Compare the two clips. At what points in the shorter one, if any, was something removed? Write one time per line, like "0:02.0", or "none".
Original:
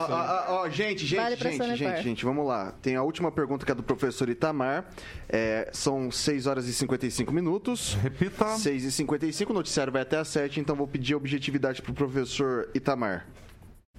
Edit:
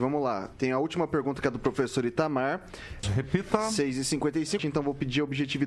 0:03.0
0:04.6